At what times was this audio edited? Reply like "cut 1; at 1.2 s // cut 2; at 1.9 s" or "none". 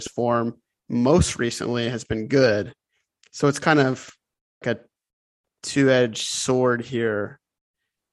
cut 1; at 4.6 s

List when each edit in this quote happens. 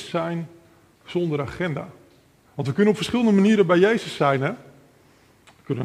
none

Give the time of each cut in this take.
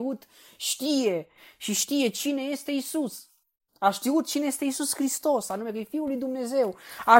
none

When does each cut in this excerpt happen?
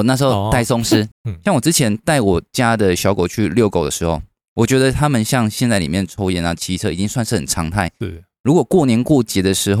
cut 1; at 1.1 s

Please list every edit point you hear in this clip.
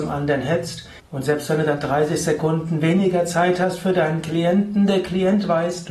cut 1; at 1.0 s

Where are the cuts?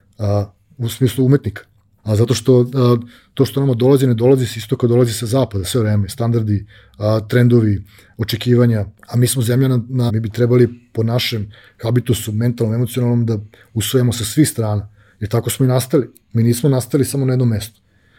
cut 1; at 2.0 s // cut 2; at 9.0 s // cut 3; at 10.1 s

